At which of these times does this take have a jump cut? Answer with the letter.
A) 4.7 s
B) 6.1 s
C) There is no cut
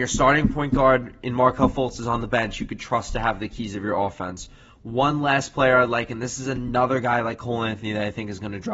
C